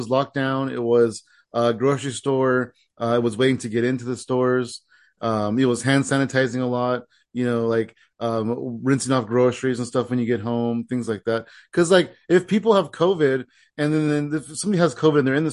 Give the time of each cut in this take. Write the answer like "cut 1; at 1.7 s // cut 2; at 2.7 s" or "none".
none